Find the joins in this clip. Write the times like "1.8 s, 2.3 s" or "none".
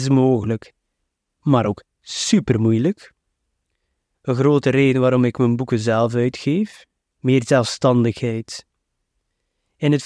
4.1 s, 7.1 s

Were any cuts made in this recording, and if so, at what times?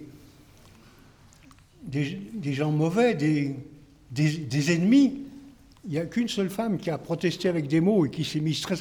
5.7 s

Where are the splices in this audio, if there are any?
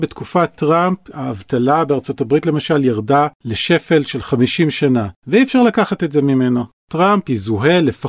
none

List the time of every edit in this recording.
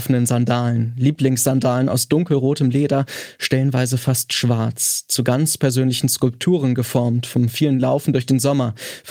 none

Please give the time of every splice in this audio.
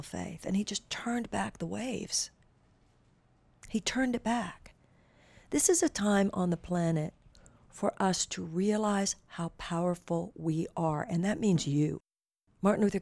none

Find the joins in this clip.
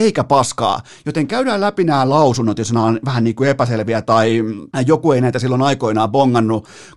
4.7 s

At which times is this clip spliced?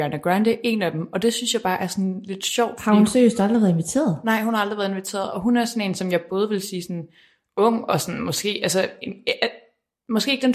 none

